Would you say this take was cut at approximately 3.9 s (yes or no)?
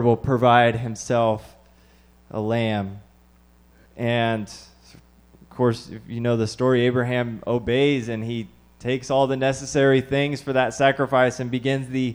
yes